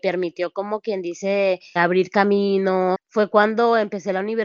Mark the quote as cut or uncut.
cut